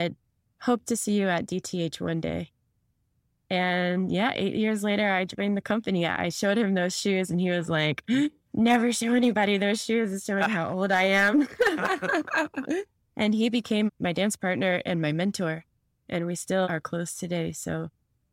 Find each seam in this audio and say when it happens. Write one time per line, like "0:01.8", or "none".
0:16.6